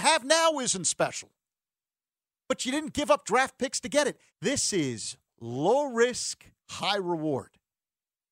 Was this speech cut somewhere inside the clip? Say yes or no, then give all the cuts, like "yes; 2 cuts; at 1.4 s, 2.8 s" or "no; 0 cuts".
yes; 2 cuts; at 4.3 s, 6.6 s